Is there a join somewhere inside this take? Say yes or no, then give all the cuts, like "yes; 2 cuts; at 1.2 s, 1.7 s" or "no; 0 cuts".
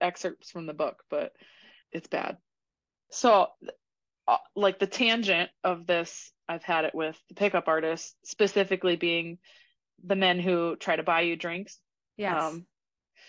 yes; 1 cut; at 1.8 s